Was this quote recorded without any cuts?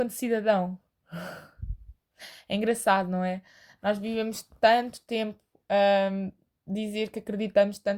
yes; 0 cuts

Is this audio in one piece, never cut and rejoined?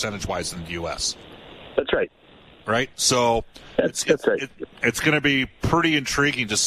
yes; 0 cuts

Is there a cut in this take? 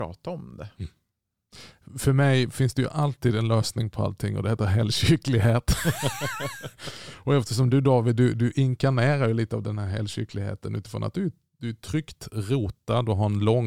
no; 0 cuts

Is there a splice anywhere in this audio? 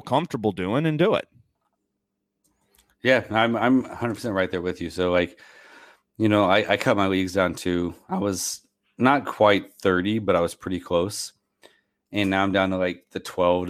no; 0 cuts

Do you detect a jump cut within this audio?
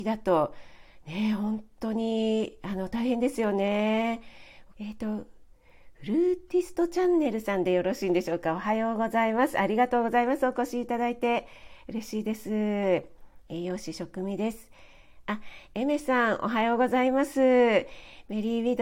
yes; 1 cut; at 4.7 s

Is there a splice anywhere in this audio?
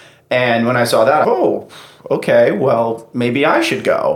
yes; 1 cut; at 1.2 s

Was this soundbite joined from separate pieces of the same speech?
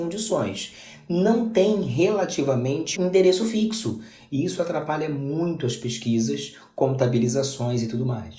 yes; 1 cut; at 2.9 s

